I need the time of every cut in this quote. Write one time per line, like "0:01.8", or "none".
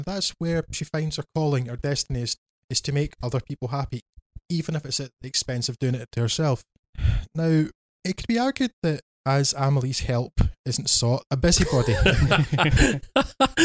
0:11.3